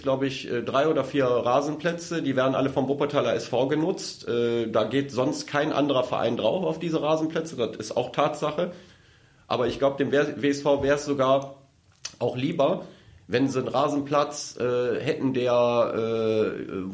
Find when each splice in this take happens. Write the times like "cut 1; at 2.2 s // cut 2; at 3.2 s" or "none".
none